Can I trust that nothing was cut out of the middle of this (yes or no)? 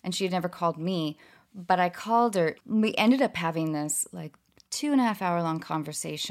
no